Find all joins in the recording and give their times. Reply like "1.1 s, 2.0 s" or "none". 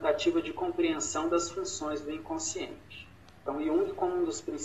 3.3 s